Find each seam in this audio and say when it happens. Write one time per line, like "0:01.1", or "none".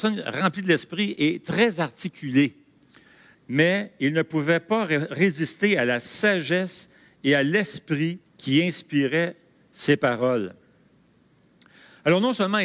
0:03.3
0:08.3